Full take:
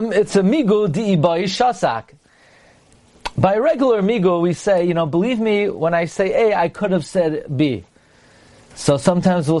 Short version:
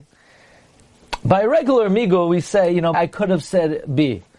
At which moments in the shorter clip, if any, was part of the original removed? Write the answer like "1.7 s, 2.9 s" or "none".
2.9 s